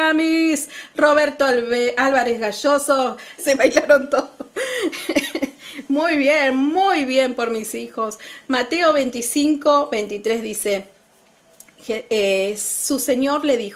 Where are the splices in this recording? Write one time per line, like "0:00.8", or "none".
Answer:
0:03.4